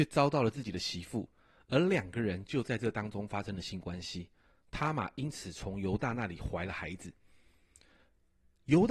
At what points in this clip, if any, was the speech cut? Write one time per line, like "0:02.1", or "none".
none